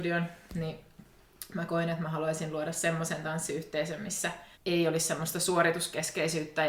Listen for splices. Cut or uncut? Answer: cut